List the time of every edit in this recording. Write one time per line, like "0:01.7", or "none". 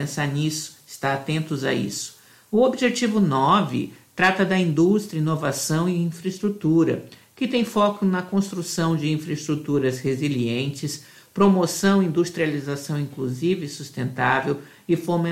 none